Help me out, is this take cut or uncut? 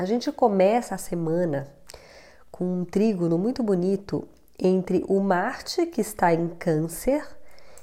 uncut